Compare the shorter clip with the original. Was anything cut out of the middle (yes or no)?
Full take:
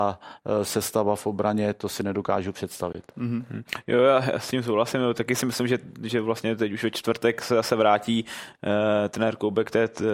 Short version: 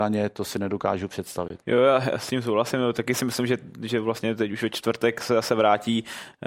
yes